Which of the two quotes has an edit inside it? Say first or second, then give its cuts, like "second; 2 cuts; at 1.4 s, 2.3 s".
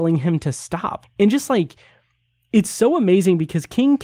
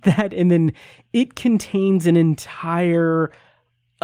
first; 1 cut; at 1.0 s